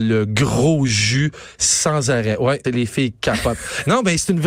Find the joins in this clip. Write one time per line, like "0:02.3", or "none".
0:02.6